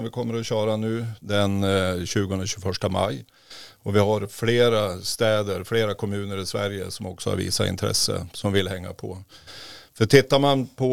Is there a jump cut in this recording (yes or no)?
no